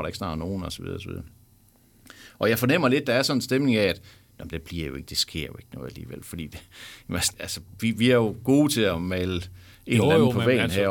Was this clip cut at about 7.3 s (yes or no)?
yes